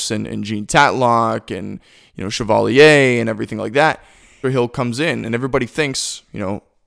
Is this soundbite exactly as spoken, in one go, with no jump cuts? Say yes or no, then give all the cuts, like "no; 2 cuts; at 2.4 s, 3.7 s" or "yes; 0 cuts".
no; 1 cut; at 4.4 s